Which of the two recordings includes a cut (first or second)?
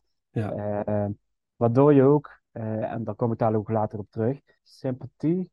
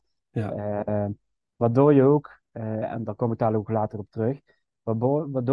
first